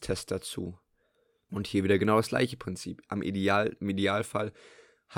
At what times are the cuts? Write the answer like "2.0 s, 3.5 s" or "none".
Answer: 1.5 s